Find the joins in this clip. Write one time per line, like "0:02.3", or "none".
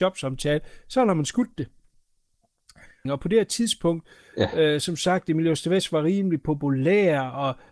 0:03.0